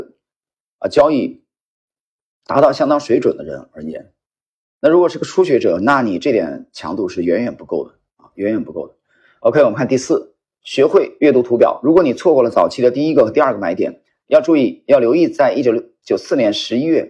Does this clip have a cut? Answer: no; 0 cuts

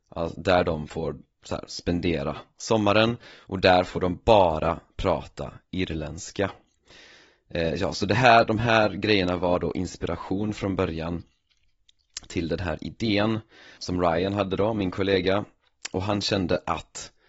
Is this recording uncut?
no; 1 cut; at 13.8 s

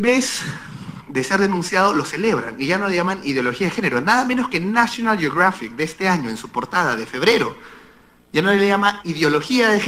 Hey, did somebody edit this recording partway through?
no; 0 cuts

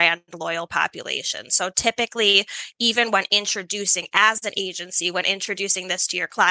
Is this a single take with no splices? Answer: yes; 0 cuts

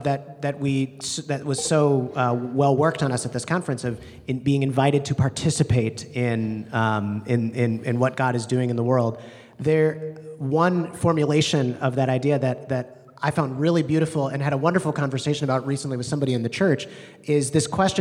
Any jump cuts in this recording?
no; 0 cuts

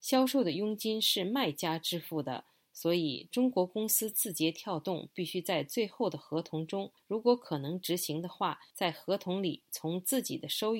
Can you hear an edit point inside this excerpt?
no; 0 cuts

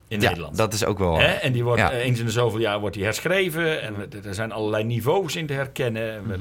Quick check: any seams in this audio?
no; 0 cuts

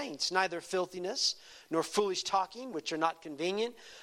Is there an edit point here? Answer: yes; 1 cut; at 2.7 s

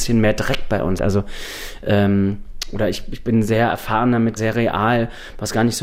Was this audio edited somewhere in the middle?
yes; 2 cuts; at 1.0 s, 4.4 s

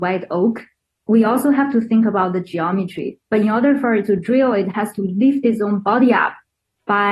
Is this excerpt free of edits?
no; 1 cut; at 3.2 s

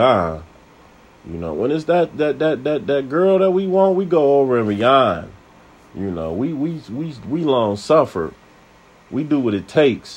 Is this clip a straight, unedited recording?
yes; 0 cuts

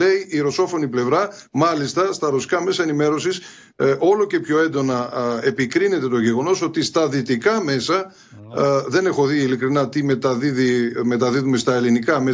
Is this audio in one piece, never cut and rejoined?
yes; 0 cuts

